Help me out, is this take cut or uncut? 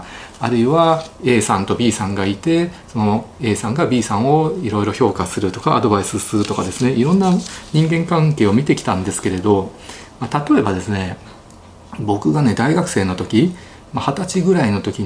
uncut